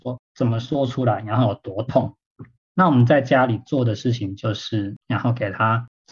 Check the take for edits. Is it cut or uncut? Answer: cut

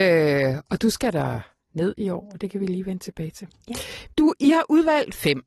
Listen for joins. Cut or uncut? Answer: cut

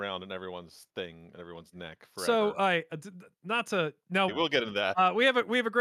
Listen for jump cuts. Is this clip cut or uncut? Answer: cut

